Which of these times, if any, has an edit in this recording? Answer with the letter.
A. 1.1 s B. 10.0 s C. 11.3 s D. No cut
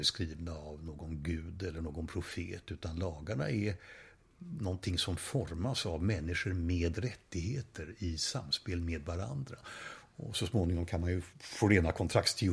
C